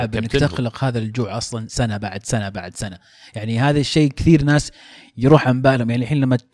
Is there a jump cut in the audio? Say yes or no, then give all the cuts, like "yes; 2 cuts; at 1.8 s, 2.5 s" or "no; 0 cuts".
no; 0 cuts